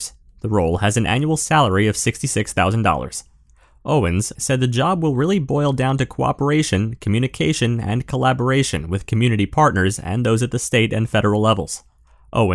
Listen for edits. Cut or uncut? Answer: cut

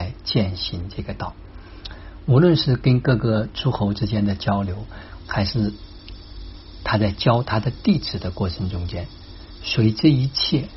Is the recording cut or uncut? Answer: cut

